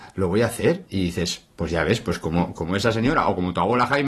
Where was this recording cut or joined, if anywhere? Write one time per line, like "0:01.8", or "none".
none